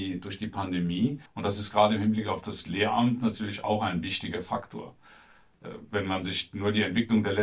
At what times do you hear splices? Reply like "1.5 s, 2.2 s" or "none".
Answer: 1.3 s